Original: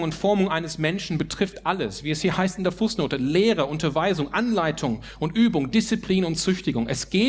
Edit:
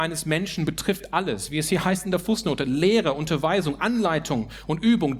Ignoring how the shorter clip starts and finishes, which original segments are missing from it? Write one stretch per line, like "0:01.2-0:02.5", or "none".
none